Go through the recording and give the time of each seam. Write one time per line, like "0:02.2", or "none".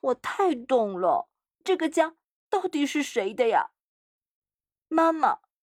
0:01.6

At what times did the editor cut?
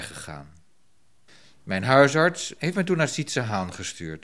0:02.6

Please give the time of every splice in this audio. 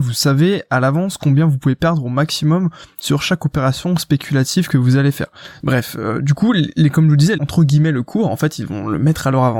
0:05.6
0:07.4

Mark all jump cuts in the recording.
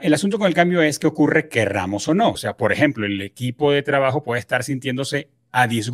0:02.3

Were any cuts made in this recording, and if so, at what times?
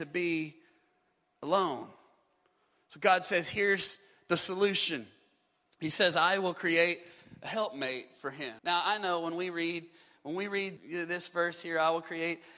0:08.6
0:10.8

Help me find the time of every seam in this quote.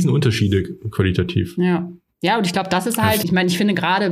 0:03.2

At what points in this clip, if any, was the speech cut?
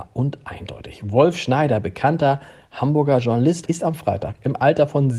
0:03.7

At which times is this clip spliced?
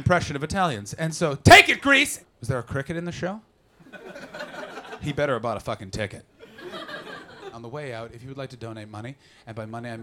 0:02.2
0:07.5

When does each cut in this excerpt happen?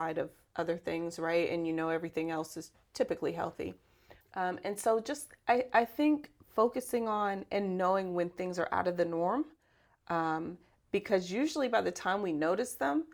0:04.2

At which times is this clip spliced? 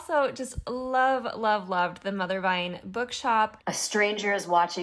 0:03.6

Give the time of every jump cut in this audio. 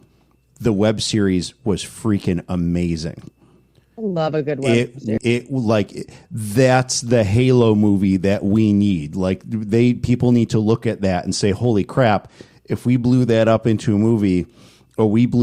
0:05.2

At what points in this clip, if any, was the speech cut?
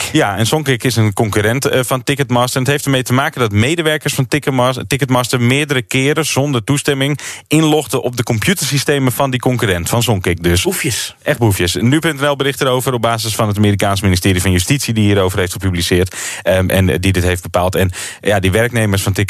none

